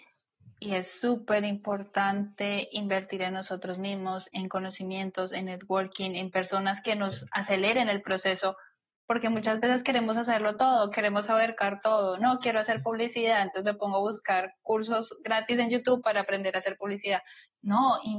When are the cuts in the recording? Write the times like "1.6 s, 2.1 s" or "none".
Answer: none